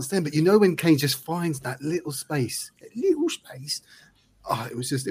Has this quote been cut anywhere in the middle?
no; 0 cuts

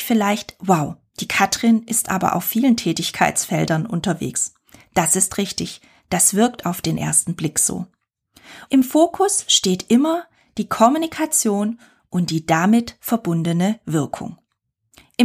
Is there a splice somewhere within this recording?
yes; 1 cut; at 8.7 s

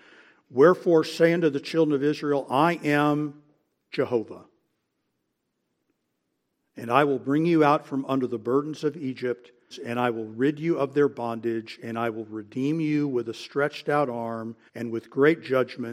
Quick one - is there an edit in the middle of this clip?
yes; 2 cuts; at 9.7 s, 14.7 s

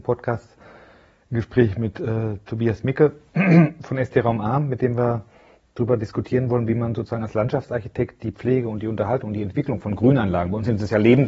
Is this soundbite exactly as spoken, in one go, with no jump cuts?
yes; 0 cuts

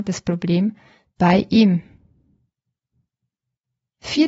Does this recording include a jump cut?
no; 0 cuts

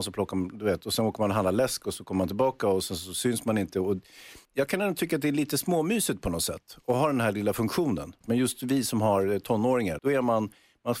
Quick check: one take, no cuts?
no; 3 cuts; at 4.5 s, 8.2 s, 10.0 s

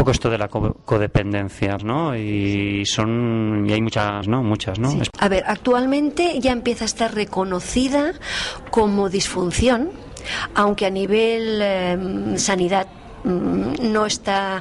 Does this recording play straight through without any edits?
no; 2 cuts; at 1.8 s, 4.2 s

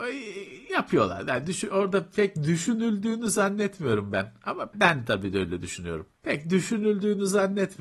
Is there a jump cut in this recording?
yes; 2 cuts; at 4.7 s, 6.1 s

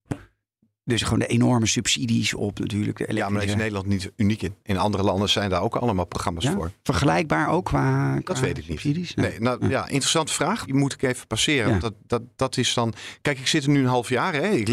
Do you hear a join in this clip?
yes; 1 cut; at 10.7 s

